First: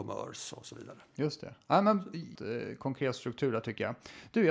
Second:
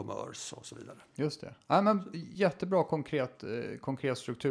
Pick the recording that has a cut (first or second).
first